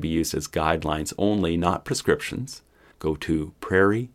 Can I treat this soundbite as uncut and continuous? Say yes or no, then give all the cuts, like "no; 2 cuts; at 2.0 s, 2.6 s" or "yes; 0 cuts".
no; 1 cut; at 2.9 s